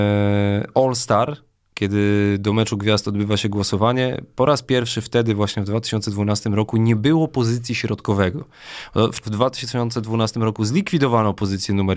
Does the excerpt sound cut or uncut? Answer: cut